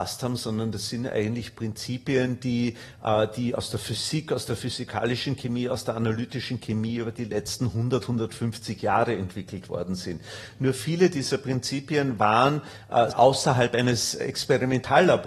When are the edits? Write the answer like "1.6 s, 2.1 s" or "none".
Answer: 13.1 s